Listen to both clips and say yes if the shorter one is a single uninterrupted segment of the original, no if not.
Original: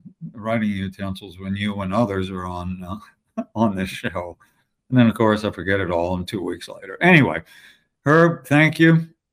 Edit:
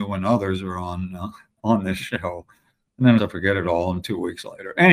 no